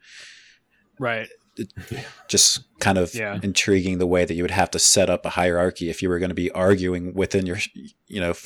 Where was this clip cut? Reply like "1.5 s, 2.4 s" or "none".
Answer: none